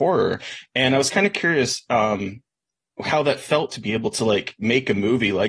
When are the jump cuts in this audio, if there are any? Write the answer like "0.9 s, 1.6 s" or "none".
none